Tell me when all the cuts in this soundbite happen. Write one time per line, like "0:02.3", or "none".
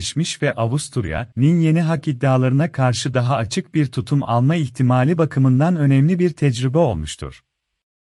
0:01.3